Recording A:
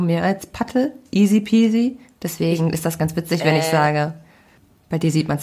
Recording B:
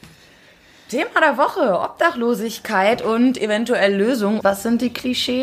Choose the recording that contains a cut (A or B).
B